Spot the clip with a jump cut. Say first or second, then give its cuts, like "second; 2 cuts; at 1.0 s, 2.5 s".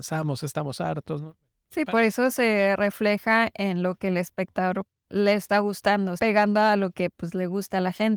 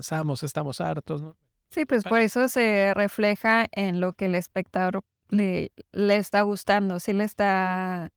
first; 3 cuts; at 1.9 s, 5.0 s, 6.2 s